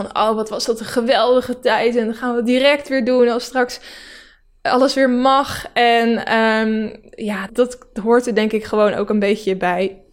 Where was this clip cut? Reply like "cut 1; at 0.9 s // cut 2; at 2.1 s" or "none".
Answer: cut 1; at 7.5 s